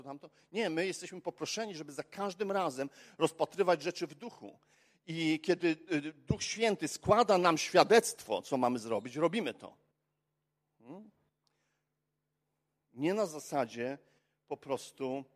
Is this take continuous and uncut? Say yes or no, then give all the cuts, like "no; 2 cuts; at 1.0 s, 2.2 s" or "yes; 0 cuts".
yes; 0 cuts